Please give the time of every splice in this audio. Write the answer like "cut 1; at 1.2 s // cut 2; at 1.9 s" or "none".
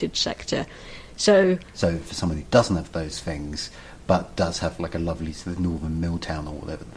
cut 1; at 1.7 s

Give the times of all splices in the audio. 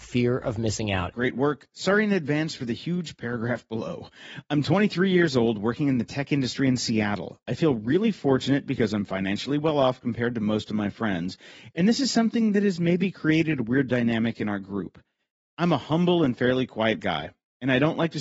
cut 1; at 1.1 s

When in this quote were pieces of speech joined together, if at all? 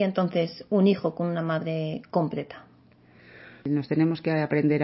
cut 1; at 3.6 s

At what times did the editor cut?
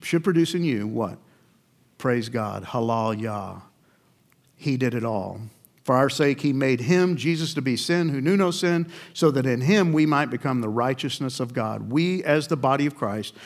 none

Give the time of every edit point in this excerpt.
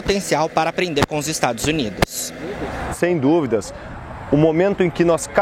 cut 1; at 2.9 s

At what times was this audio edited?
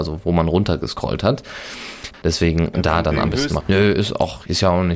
cut 1; at 2.1 s // cut 2; at 3.6 s

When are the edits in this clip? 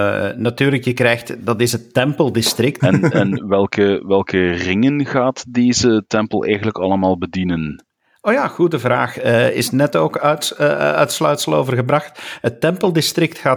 cut 1; at 2.8 s

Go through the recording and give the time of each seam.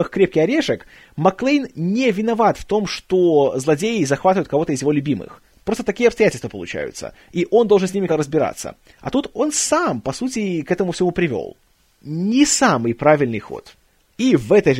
cut 1; at 8.1 s

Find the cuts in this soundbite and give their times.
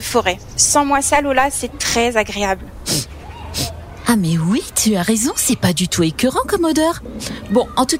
none

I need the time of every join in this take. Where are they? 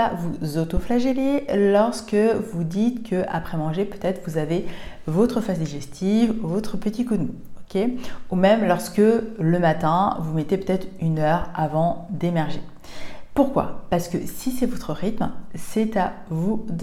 none

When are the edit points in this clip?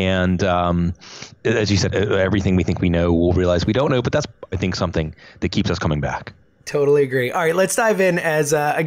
cut 1; at 1.9 s // cut 2; at 4.5 s

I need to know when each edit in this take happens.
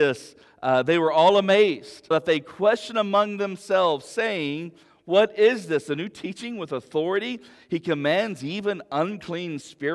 cut 1; at 2.1 s

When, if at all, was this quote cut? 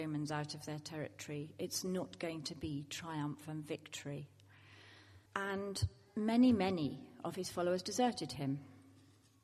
cut 1; at 5.3 s

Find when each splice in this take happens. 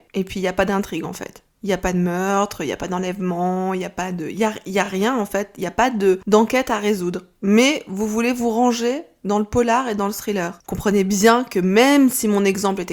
none

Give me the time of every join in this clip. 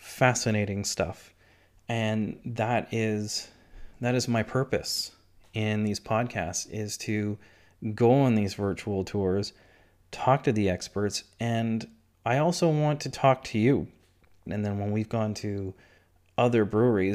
cut 1; at 14.5 s

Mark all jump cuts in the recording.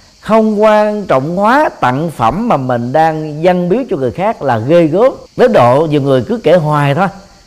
cut 1; at 5.3 s

